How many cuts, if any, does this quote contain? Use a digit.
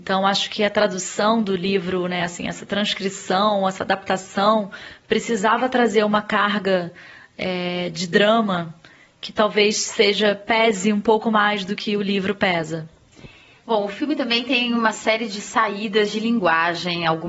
0